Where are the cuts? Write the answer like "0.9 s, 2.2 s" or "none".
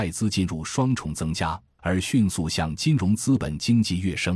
1.8 s